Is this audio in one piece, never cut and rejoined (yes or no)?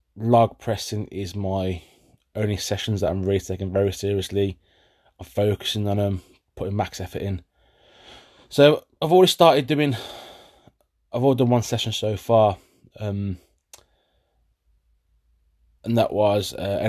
yes